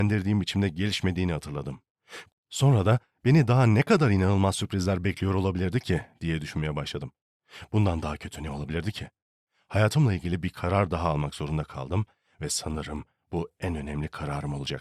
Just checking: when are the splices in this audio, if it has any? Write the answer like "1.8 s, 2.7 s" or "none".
2.3 s